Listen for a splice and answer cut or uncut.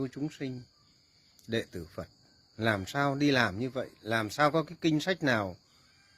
uncut